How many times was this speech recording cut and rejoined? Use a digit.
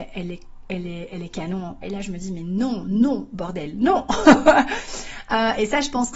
1